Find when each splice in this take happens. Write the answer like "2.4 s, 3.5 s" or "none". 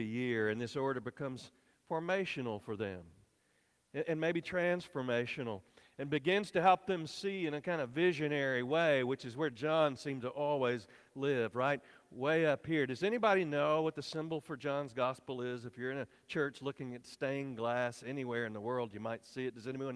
none